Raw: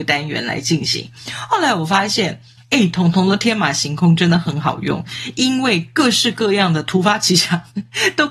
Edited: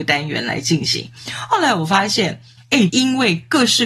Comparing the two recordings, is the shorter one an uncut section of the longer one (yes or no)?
no